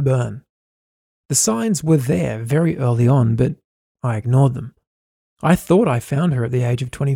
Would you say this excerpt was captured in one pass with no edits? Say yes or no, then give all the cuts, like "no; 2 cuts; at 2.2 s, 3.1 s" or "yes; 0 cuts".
no; 1 cut; at 5.3 s